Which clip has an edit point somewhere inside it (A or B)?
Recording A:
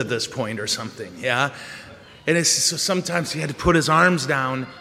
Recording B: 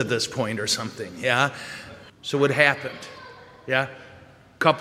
B